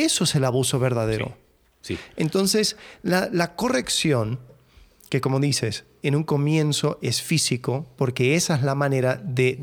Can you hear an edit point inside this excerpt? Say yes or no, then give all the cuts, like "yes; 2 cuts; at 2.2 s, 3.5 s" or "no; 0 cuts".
no; 0 cuts